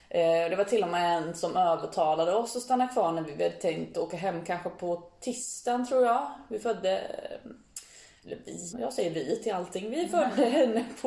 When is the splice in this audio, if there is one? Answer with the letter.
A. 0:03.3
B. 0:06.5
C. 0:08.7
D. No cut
C